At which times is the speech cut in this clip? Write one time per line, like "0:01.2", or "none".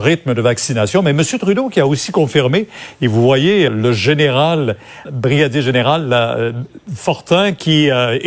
0:03.7
0:05.1